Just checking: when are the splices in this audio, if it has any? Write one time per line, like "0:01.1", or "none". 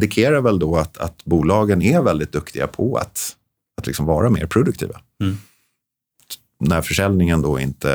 none

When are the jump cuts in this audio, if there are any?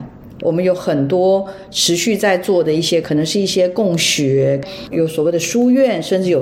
0:03.0
0:04.9

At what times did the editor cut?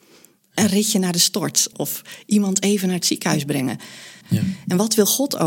0:01.7
0:04.2

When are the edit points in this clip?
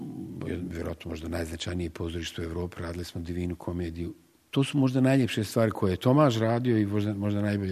0:04.5

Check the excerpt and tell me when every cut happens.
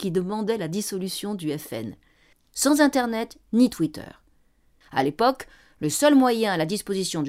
0:02.3
0:04.8

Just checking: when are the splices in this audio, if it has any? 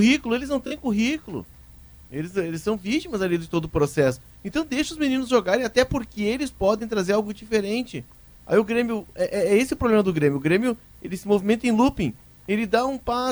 none

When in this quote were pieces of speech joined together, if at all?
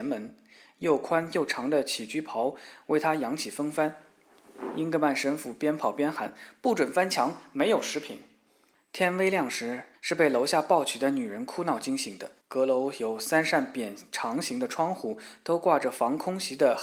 0:08.7
0:09.9
0:12.4

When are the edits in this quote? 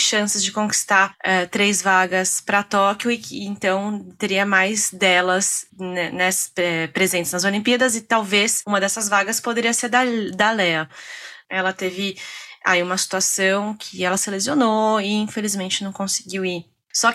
0:11.4

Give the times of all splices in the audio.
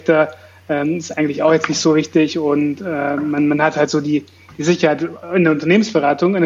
none

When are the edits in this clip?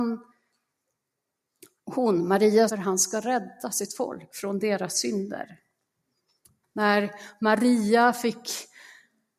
0:02.7
0:06.6

